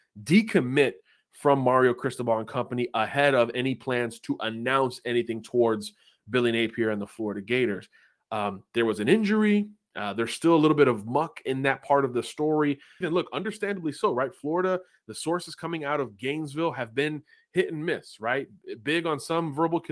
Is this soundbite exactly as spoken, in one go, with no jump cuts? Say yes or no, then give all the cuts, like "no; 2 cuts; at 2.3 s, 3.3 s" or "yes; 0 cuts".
no; 1 cut; at 13.0 s